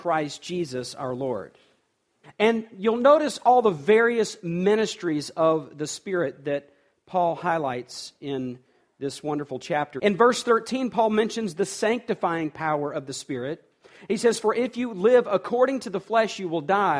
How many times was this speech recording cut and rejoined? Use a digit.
2